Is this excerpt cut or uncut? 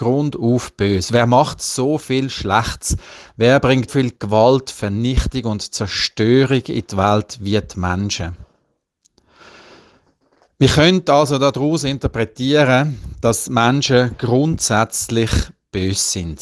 cut